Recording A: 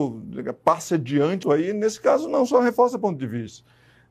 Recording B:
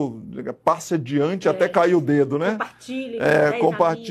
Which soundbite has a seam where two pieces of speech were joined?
A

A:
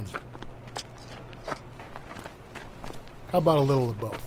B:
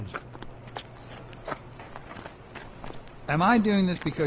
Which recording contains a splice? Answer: A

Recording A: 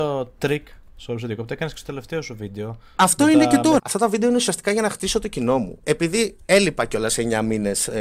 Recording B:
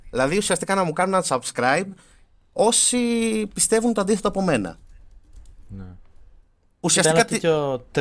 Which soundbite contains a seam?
A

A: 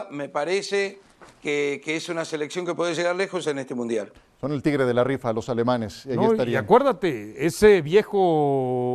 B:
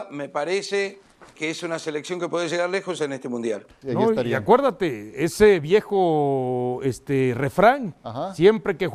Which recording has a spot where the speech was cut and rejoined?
B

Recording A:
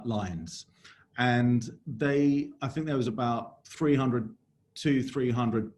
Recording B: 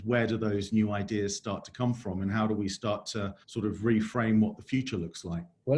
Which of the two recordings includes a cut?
B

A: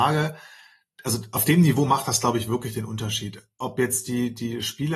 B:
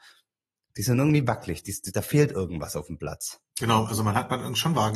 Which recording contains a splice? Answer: B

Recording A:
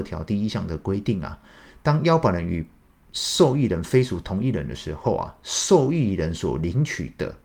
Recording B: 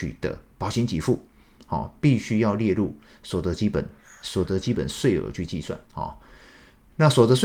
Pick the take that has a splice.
B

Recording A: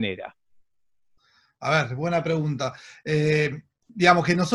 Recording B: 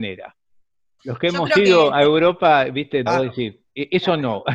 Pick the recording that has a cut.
B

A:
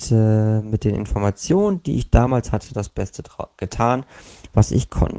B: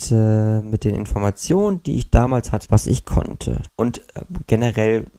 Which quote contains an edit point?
B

